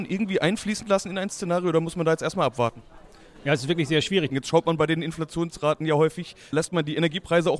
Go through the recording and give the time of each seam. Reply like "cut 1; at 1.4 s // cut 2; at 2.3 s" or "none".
cut 1; at 4.3 s